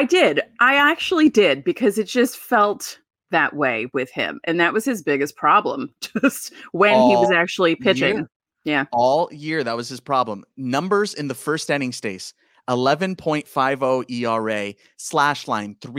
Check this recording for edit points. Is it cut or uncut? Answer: uncut